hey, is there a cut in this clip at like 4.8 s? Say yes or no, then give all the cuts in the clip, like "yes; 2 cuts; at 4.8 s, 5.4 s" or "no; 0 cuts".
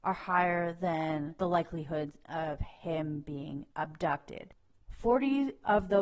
yes; 1 cut; at 4.8 s